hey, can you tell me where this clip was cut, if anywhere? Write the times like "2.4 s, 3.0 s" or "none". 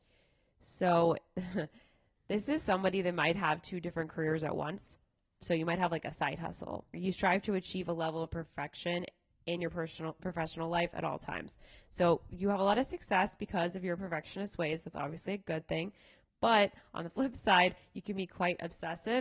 6.9 s